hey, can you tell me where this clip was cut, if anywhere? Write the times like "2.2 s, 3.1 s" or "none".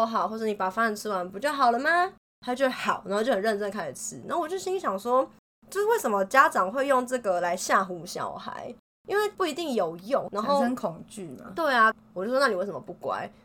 10.3 s, 11.9 s